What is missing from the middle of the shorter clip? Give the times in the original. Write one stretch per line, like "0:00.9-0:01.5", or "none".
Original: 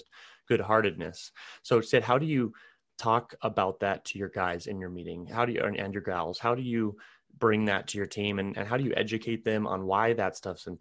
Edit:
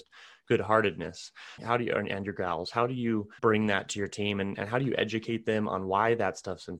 0:01.6-0:05.3
0:07.1-0:07.4